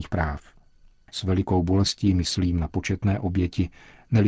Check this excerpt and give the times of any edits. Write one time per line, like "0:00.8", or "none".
0:01.1

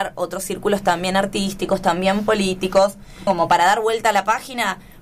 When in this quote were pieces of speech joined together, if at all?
0:03.3

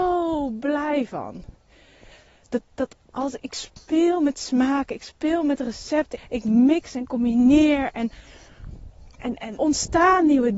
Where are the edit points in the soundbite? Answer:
0:06.2
0:09.6

